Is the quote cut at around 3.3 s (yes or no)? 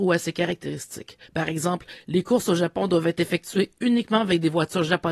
no